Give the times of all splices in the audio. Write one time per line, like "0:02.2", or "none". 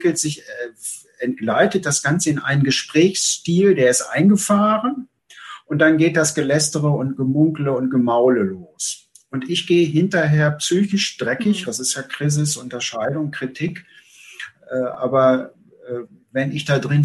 0:11.7

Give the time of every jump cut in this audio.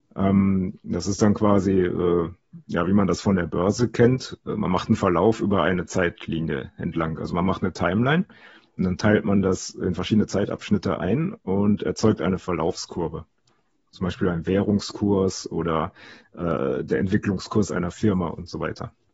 none

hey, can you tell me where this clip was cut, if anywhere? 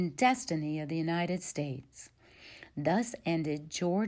none

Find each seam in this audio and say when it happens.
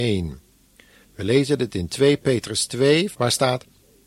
0:01.0
0:03.1

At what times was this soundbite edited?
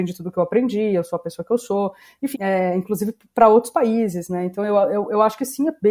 0:02.3

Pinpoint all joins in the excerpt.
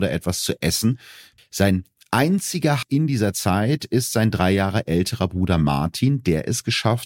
0:01.4
0:02.8

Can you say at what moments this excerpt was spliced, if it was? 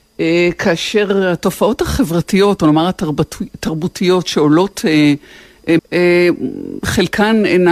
0:05.8

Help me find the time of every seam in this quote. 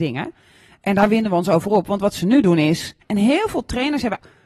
0:03.0

